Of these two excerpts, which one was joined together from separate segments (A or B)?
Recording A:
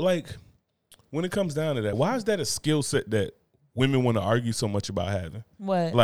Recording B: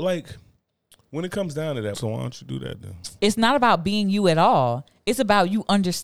B